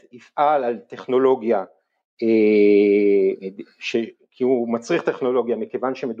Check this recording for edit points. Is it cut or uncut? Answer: uncut